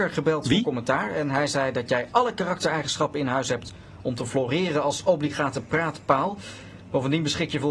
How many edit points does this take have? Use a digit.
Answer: 0